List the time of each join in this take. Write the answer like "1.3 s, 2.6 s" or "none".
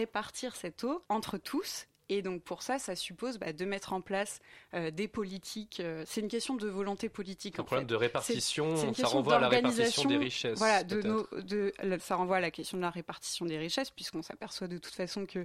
1.1 s, 12.0 s